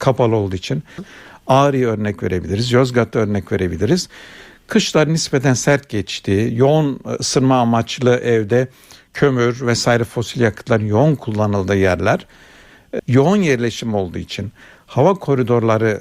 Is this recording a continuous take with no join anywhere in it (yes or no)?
no